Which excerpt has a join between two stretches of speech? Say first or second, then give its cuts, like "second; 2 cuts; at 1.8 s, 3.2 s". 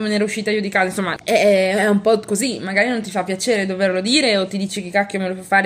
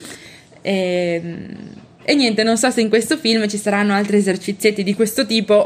first; 1 cut; at 1.2 s